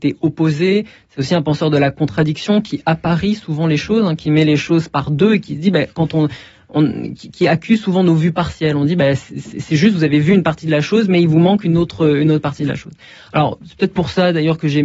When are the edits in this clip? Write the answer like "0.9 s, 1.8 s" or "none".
none